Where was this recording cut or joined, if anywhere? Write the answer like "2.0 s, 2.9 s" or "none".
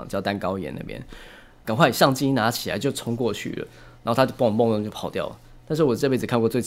1.6 s